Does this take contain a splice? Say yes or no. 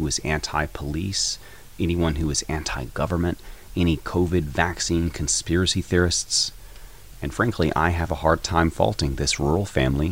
no